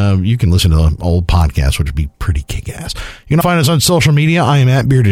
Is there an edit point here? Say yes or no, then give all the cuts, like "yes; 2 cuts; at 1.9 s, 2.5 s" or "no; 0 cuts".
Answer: yes; 1 cut; at 3.4 s